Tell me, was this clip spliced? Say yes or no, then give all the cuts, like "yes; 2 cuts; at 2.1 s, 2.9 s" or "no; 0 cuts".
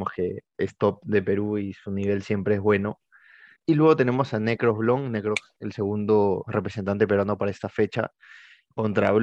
yes; 1 cut; at 3.5 s